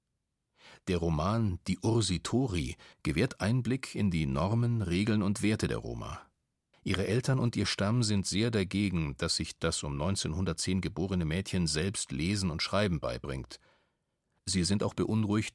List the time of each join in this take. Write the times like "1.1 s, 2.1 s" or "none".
2.9 s, 6.7 s